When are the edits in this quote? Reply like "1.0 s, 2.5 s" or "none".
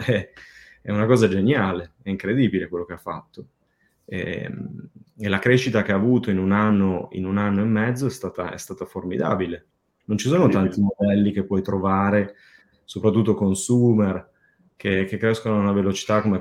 none